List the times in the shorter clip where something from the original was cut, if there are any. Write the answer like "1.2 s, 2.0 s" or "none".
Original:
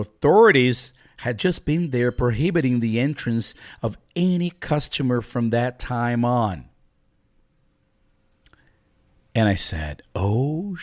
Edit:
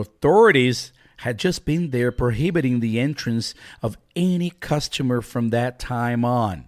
none